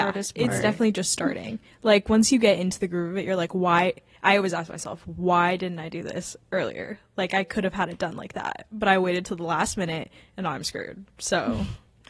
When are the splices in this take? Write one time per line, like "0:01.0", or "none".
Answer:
none